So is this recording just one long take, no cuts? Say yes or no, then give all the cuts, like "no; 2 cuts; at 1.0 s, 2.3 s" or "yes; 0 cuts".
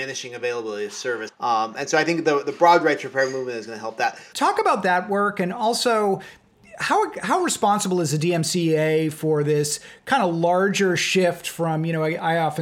no; 2 cuts; at 1.3 s, 4.3 s